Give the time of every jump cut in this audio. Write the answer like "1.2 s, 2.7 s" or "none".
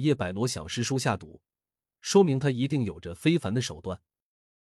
none